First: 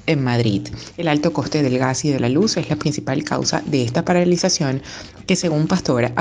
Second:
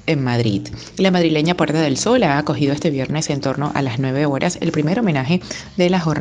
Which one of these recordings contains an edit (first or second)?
first